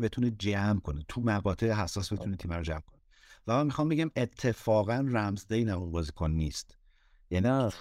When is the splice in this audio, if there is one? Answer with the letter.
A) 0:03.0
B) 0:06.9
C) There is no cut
C